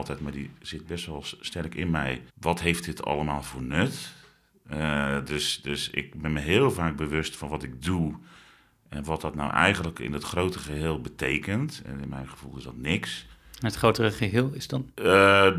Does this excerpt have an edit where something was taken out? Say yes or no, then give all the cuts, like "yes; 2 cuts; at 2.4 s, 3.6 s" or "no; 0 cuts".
yes; 1 cut; at 2.3 s